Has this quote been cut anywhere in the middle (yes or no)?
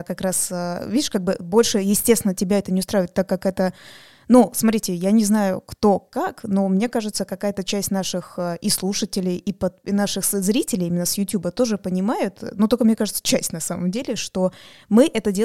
no